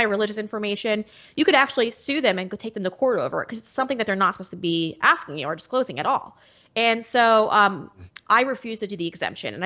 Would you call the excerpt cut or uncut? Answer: uncut